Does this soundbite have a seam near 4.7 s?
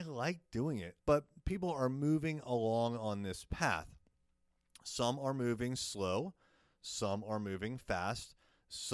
no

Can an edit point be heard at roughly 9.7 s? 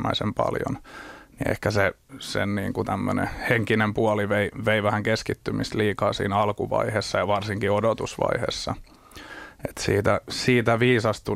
no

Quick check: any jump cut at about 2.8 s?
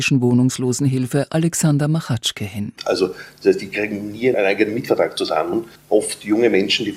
yes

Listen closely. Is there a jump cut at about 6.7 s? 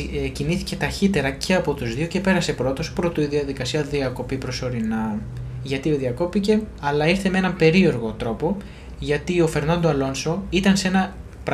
yes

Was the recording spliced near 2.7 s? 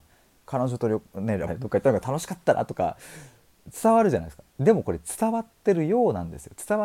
no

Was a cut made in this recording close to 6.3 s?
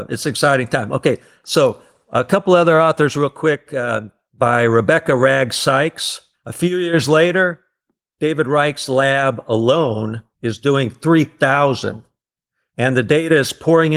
yes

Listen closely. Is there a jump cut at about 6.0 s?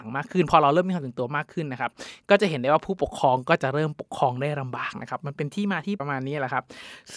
yes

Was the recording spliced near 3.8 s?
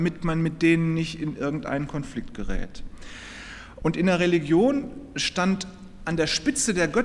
yes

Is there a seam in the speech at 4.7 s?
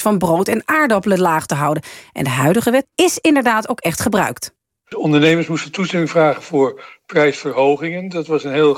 no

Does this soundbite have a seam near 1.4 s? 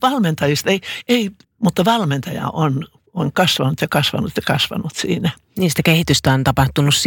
yes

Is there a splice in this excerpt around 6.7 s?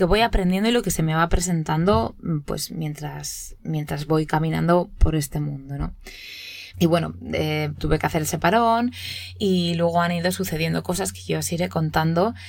yes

